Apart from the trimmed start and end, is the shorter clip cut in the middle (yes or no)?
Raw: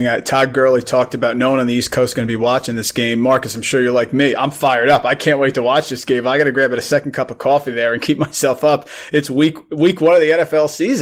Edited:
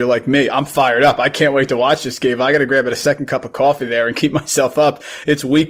no